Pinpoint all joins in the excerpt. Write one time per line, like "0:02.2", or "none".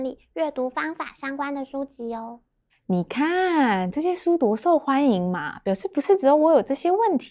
none